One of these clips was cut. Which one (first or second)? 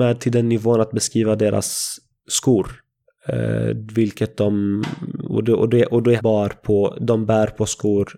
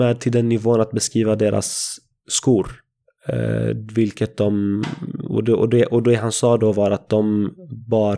first